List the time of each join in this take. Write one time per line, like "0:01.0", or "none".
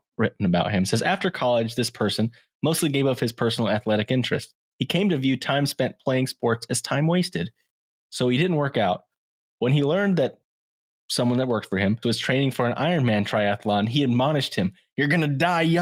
0:08.0
0:12.0